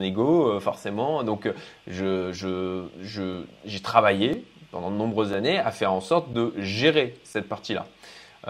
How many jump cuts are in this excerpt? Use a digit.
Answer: 0